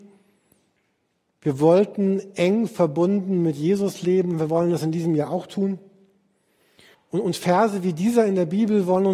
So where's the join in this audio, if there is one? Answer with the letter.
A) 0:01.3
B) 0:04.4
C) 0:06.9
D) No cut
C